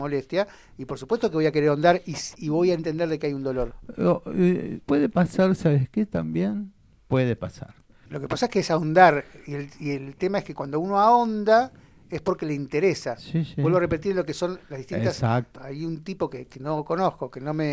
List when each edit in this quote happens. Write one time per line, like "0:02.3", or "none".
0:04.8
0:08.1
0:15.6